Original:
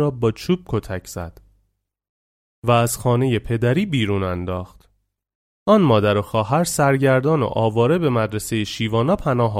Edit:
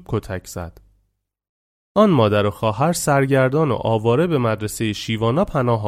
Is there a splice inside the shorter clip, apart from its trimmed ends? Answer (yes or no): yes